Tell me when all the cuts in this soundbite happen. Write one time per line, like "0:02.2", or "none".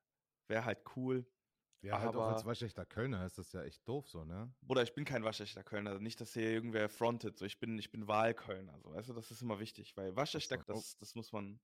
0:10.6